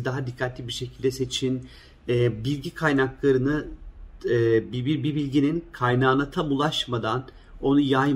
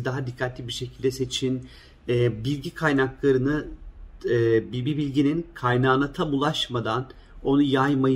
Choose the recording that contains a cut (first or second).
second